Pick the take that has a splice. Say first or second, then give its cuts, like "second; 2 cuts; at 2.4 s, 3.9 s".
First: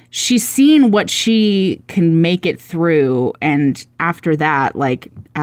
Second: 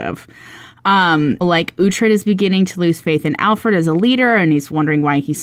second; 1 cut; at 1.4 s